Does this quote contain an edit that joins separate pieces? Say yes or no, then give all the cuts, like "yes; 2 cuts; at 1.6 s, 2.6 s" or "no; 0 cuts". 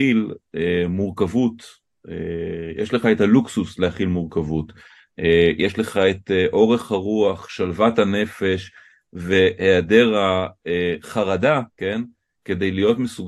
yes; 1 cut; at 11.7 s